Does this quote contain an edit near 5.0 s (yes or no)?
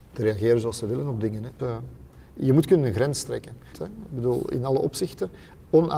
no